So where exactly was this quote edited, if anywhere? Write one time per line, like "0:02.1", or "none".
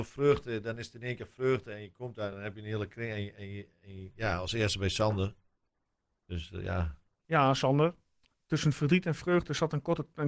none